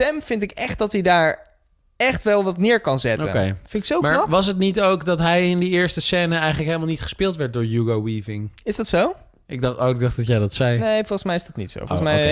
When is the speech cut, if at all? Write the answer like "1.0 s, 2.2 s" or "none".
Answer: none